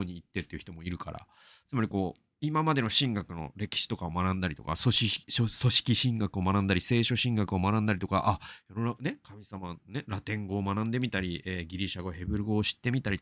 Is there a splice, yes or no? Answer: no